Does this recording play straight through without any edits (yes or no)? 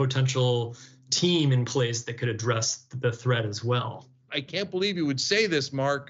no